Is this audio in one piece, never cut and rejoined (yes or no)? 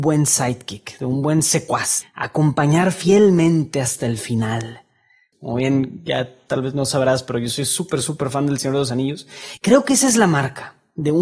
no